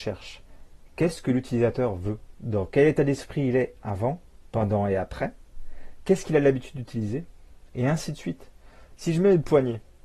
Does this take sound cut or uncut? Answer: cut